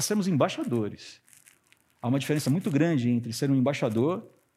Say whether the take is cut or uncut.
uncut